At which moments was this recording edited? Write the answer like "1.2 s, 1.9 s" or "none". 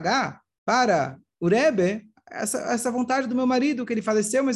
none

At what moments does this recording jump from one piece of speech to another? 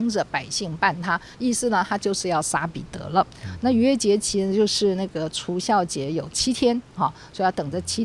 none

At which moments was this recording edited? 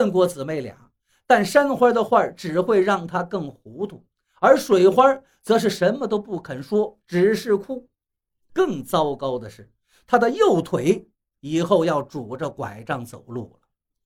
8.5 s

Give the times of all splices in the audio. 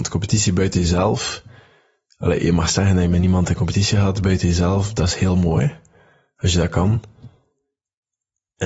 none

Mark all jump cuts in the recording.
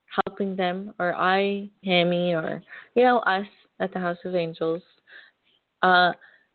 1.8 s

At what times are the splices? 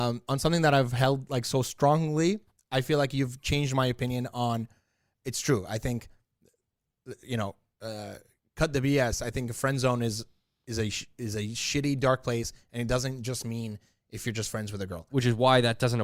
15.1 s

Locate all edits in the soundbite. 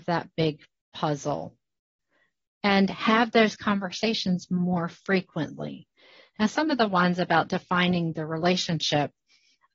none

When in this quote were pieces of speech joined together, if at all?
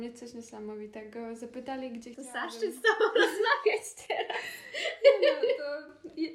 none

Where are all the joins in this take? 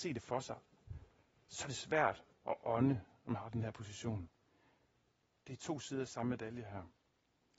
5.3 s

